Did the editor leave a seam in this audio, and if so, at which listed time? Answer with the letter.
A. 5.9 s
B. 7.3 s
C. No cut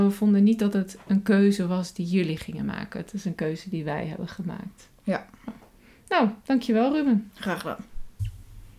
C